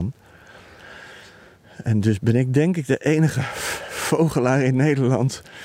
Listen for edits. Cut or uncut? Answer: uncut